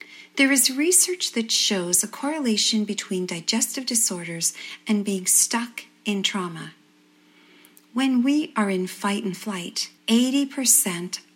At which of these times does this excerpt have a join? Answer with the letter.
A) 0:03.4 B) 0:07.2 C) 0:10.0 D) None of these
C